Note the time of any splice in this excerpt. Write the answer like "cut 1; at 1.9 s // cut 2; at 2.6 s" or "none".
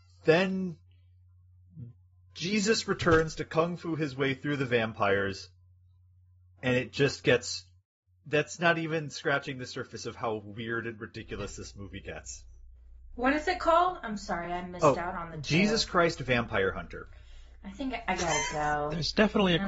none